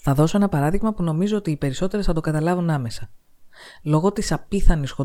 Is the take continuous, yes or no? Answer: yes